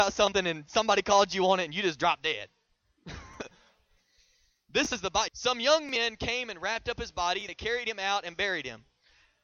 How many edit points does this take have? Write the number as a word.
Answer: one